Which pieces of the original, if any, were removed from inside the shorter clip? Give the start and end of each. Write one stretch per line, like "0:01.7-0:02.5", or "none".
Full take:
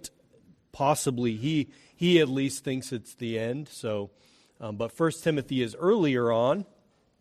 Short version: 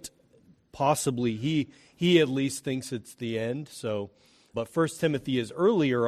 0:04.5-0:04.8